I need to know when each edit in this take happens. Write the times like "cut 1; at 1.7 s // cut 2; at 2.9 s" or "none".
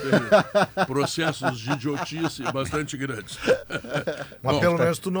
none